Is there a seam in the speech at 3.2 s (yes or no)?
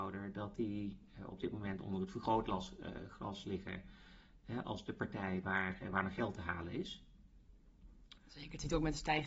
no